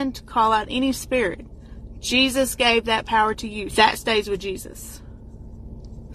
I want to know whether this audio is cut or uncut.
cut